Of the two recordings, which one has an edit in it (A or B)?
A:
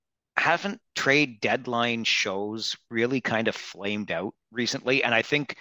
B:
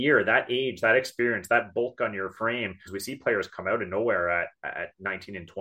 B